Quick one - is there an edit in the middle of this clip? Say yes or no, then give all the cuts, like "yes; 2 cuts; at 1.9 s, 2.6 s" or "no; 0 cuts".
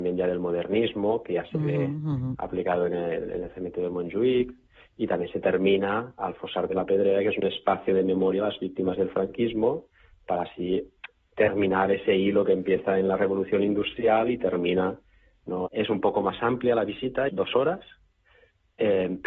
yes; 2 cuts; at 15.7 s, 17.3 s